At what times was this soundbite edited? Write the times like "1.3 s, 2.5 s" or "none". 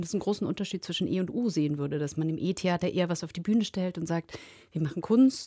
none